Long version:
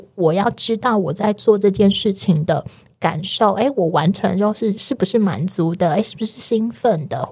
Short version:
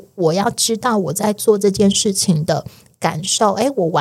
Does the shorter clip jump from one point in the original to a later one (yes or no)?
no